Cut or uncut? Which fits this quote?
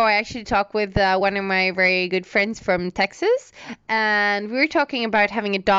uncut